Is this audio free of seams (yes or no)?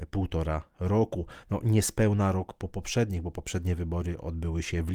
yes